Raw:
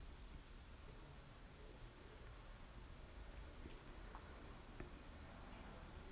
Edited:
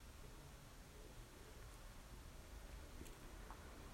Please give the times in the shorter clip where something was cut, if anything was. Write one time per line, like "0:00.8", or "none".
none